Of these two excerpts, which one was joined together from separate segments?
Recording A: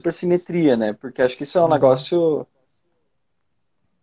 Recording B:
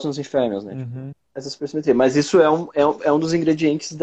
B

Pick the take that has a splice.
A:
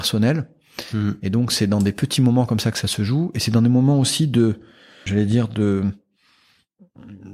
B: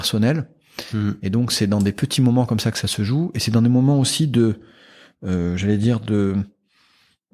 A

